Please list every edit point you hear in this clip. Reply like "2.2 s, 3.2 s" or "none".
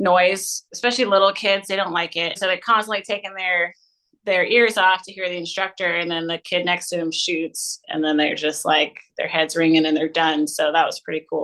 2.4 s